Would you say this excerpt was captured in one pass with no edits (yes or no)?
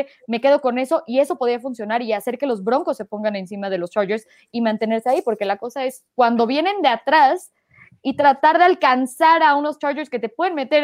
yes